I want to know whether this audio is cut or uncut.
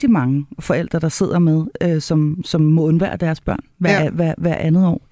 uncut